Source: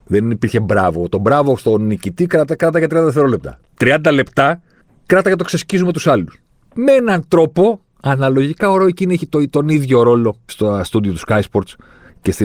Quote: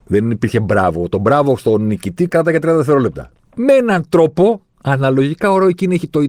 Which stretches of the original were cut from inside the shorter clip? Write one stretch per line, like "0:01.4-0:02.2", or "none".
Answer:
0:02.3-0:02.6
0:03.7-0:06.6